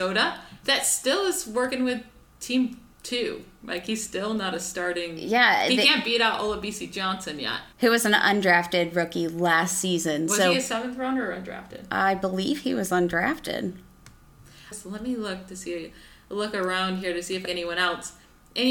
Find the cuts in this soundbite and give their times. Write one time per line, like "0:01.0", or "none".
0:07.7
0:14.7
0:17.5